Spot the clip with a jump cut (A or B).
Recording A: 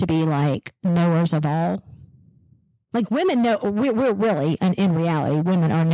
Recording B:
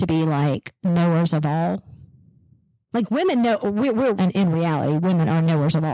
B